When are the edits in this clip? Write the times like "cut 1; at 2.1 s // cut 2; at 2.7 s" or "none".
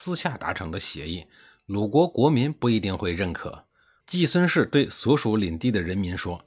cut 1; at 4.0 s